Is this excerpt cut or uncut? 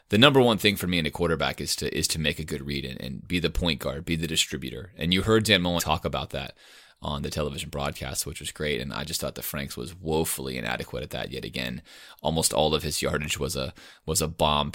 cut